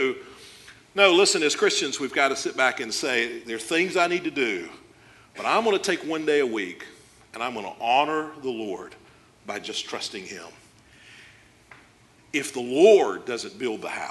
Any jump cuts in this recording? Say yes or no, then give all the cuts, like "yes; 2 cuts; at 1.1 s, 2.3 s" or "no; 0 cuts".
no; 0 cuts